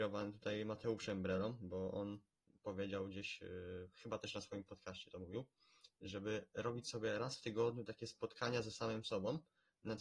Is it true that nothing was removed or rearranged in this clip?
yes; 0 cuts

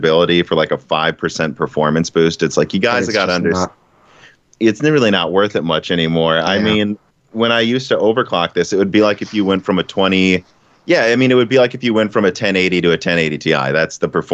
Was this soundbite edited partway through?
no; 0 cuts

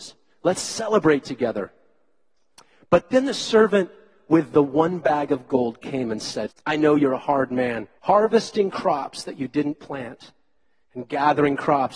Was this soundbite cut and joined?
yes; 2 cuts; at 6.5 s, 8.0 s

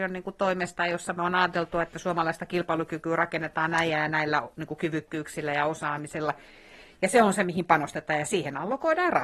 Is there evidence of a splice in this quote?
no; 0 cuts

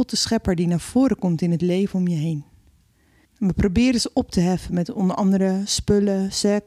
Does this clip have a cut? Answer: yes; 1 cut; at 3.2 s

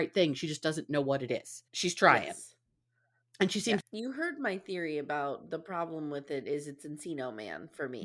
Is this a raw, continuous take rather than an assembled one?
no; 2 cuts; at 1.7 s, 3.8 s

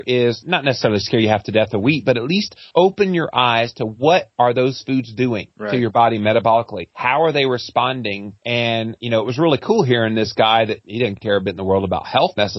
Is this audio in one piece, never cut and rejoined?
yes; 0 cuts

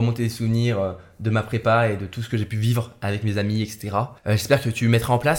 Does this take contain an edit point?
yes; 1 cut; at 4.2 s

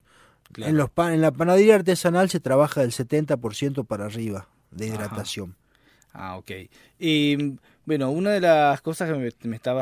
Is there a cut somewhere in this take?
no; 0 cuts

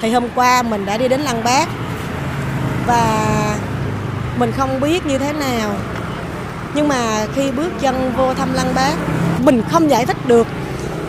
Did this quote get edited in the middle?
yes; 1 cut; at 9.4 s

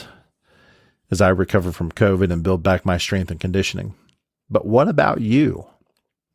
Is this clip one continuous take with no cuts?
yes; 0 cuts

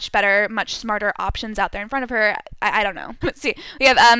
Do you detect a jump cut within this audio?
yes; 1 cut; at 3.2 s

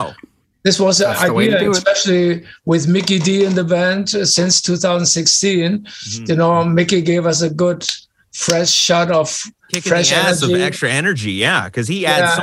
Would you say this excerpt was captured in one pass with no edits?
yes; 0 cuts

